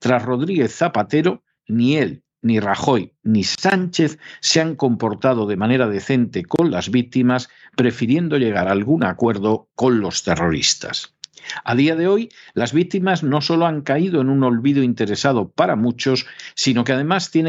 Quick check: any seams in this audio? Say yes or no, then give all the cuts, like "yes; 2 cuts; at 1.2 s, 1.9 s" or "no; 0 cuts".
no; 0 cuts